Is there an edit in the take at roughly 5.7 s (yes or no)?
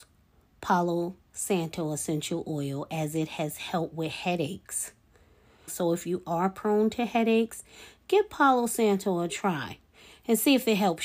yes